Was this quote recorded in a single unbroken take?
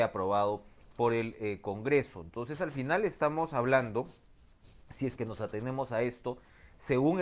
yes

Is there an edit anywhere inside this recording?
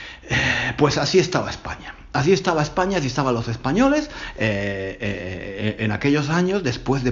no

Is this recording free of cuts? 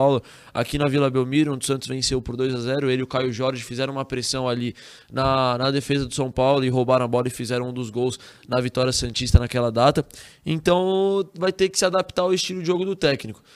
yes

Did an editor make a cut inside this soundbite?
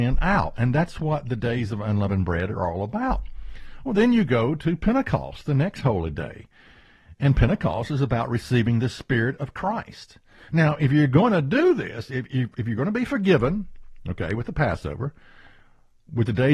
no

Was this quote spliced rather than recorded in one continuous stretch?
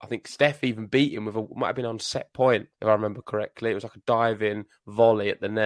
yes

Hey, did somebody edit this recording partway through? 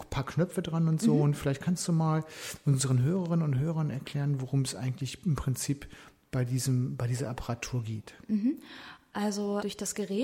no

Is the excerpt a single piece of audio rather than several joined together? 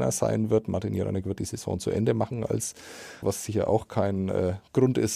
no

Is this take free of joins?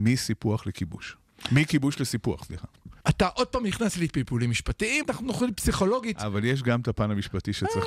no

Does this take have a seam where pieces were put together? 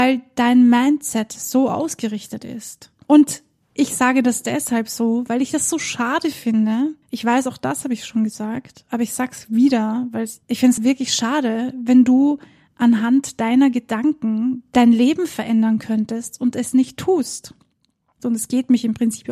yes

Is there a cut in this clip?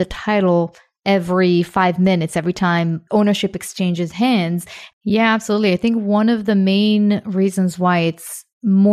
yes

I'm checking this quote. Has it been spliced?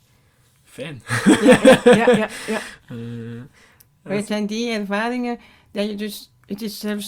no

